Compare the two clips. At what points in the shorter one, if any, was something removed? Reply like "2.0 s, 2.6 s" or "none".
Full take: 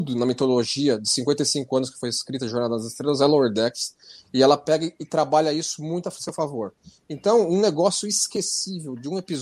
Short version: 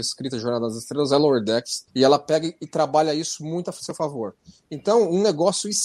1.9 s